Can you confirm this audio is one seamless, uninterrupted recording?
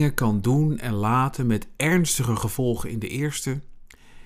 yes; 0 cuts

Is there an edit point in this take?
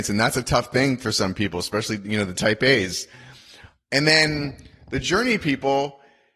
no; 0 cuts

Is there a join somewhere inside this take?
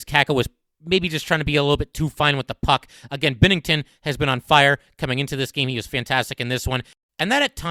no; 0 cuts

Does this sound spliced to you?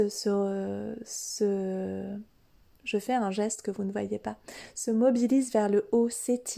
no; 0 cuts

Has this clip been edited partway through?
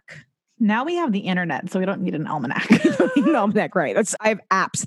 no; 0 cuts

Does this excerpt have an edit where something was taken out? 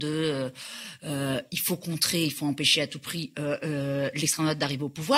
no; 0 cuts

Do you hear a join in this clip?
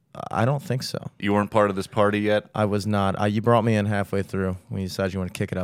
no; 0 cuts

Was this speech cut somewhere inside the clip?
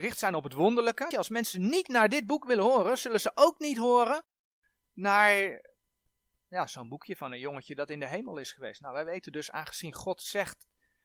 yes; 1 cut; at 1.1 s

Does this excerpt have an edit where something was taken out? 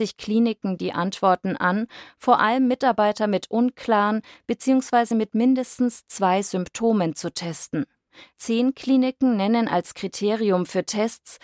no; 0 cuts

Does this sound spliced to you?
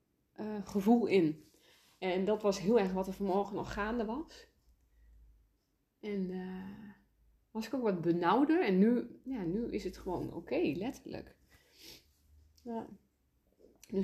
no; 0 cuts

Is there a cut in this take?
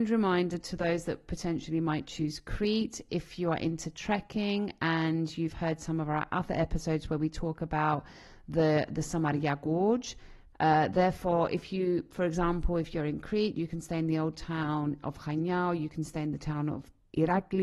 yes; 1 cut; at 10.5 s

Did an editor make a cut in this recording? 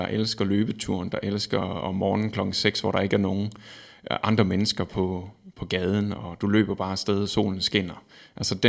no; 0 cuts

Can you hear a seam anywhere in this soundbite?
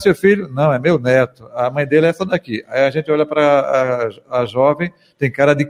no; 0 cuts

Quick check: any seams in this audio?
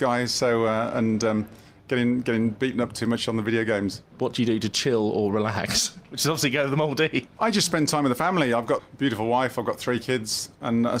yes; 1 cut; at 4.0 s

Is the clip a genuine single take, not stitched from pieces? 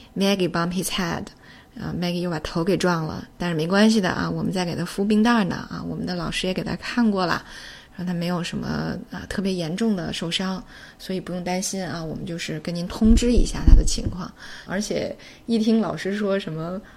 no; 1 cut; at 14.7 s

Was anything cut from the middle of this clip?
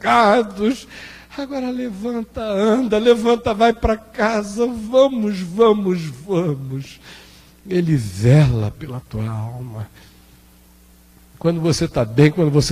no; 0 cuts

